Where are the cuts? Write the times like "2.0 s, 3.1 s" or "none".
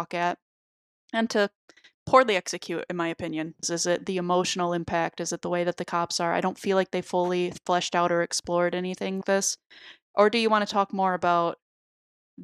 3.6 s, 9.2 s